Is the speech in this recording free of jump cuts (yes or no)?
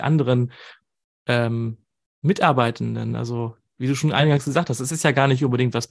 yes